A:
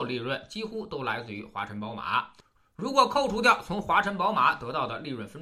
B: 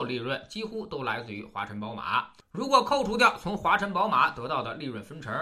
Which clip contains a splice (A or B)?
B